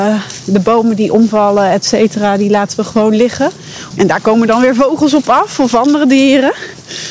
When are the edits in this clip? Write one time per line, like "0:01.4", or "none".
0:03.9